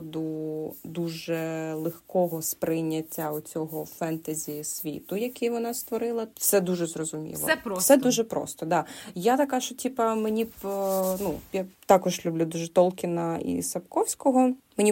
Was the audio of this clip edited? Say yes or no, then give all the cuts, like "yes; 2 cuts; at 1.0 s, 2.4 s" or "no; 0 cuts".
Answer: yes; 1 cut; at 6.3 s